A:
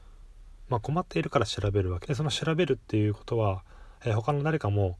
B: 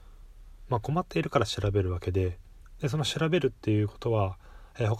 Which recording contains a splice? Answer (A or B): A